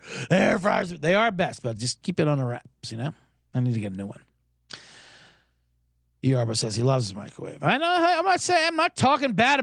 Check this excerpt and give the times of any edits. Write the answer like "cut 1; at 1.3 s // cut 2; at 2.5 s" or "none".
none